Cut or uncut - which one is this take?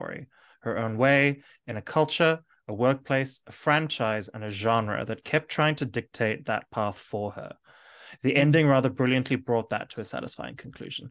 uncut